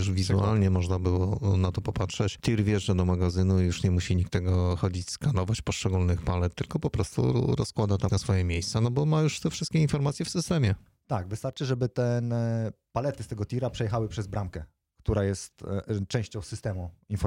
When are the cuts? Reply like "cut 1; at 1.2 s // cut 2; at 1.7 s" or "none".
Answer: cut 1; at 8.1 s